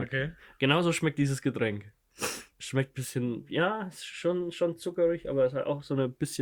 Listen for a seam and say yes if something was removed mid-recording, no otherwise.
no